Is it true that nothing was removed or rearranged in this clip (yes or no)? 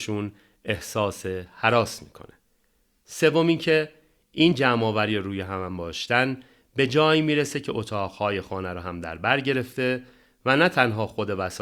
yes